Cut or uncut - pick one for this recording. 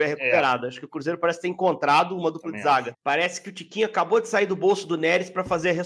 cut